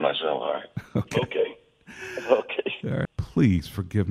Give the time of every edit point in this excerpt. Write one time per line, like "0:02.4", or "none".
0:03.0